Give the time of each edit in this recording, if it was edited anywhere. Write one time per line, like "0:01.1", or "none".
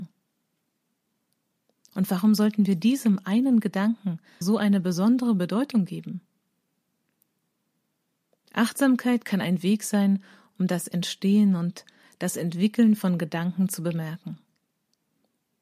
0:04.4